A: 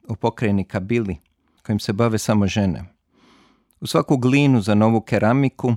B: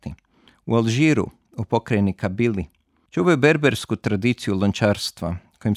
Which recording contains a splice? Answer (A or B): A